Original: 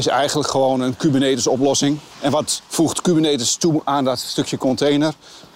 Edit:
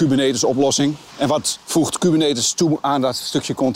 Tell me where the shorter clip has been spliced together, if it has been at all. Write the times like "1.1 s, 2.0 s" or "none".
none